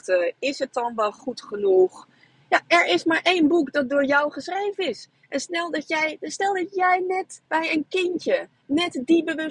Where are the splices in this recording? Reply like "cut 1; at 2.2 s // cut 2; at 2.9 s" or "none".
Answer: cut 1; at 7.5 s